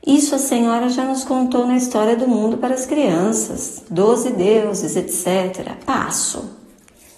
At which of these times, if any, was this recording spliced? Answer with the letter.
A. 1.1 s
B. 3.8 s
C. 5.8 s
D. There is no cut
D